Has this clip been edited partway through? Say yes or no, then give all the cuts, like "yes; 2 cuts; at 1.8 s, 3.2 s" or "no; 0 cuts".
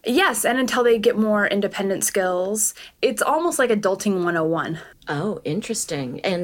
yes; 1 cut; at 4.9 s